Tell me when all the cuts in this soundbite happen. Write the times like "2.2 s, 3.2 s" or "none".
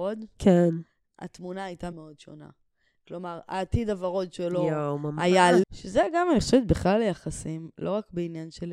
1.9 s, 5.6 s

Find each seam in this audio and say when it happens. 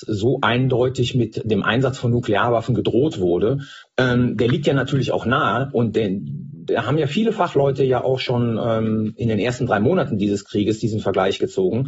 3.8 s

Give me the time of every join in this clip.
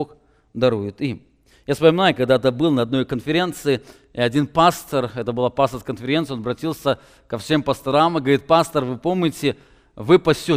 none

